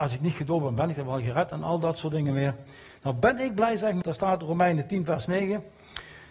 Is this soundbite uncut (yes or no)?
no